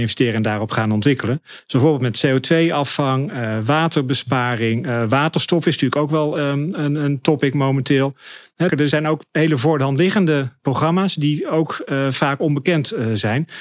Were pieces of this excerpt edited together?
yes; 1 cut; at 8.7 s

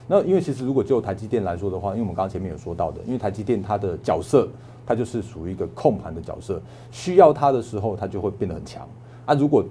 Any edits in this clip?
no; 0 cuts

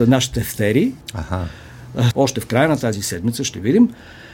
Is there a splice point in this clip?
yes; 2 cuts; at 1.0 s, 2.1 s

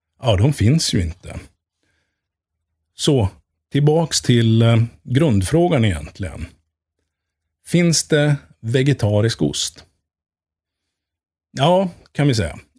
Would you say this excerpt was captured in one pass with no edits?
yes; 0 cuts

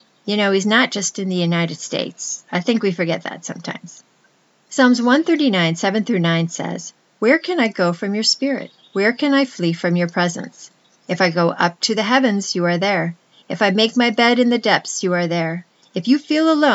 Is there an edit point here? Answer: yes; 1 cut; at 15.8 s

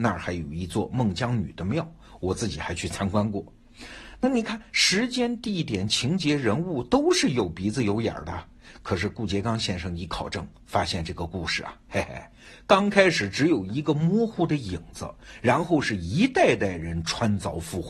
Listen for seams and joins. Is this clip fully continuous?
yes; 0 cuts

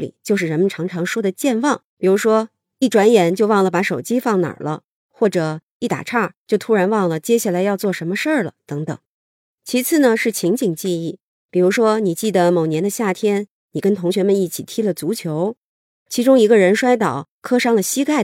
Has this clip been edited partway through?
yes; 1 cut; at 1.9 s

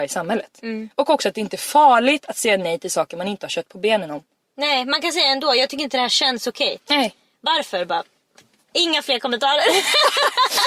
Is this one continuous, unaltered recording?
yes; 0 cuts

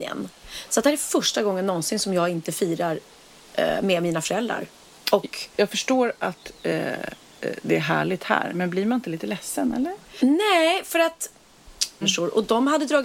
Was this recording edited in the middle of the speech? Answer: yes; 2 cuts; at 10.2 s, 12.0 s

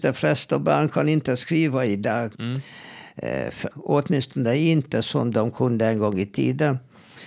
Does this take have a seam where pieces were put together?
yes; 2 cuts; at 2.3 s, 3.7 s

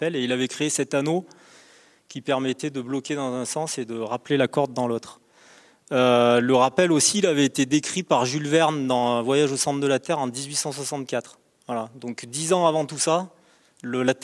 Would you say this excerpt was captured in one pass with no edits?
yes; 0 cuts

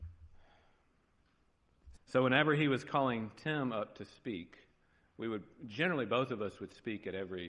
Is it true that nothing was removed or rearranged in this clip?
no; 1 cut; at 2.0 s

